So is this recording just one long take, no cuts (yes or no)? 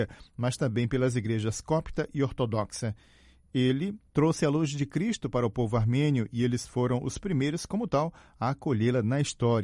yes